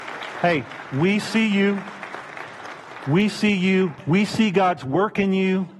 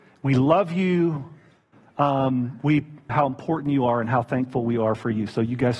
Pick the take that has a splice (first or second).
second